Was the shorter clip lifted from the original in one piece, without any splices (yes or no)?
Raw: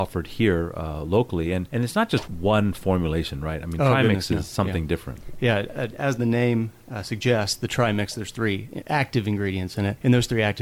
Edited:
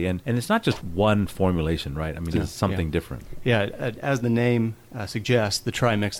no